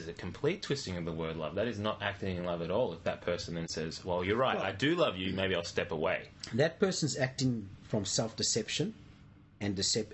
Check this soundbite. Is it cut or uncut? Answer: uncut